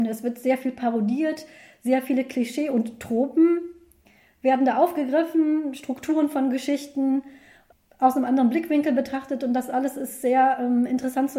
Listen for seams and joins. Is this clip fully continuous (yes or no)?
yes